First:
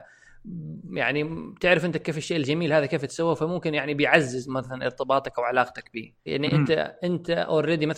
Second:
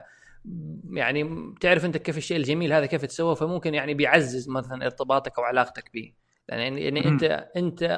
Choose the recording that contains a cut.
first; 1 cut; at 6.3 s

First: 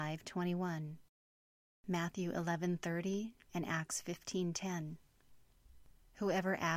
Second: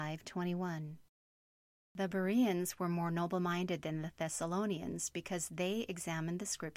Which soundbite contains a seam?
first; 2 cuts; at 1.7 s, 3.5 s

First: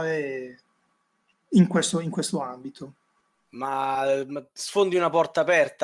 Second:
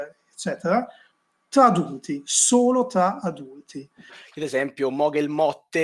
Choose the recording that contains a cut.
second; 1 cut; at 4.1 s

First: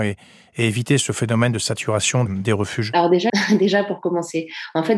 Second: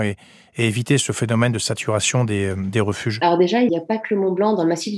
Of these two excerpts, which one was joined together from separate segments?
first; 2 cuts; at 2.3 s, 3.3 s

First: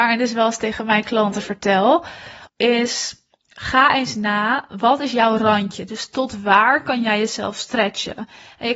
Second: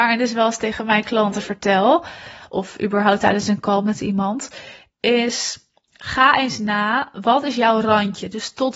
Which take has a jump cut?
first; 1 cut; at 2.5 s

